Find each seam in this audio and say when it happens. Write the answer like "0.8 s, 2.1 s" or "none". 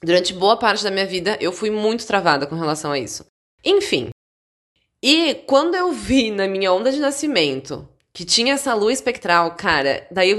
none